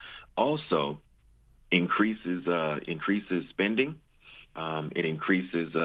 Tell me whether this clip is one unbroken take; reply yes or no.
no